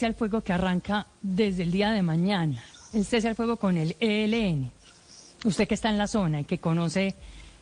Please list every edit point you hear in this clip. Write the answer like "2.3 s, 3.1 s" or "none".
none